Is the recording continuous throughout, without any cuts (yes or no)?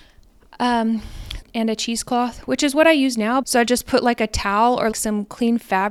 no